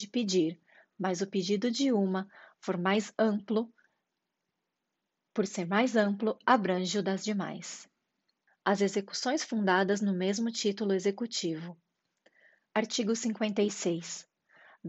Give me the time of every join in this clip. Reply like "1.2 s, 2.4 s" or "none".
8.5 s, 12.7 s